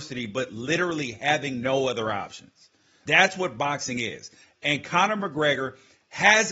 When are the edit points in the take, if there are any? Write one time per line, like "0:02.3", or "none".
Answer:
0:03.1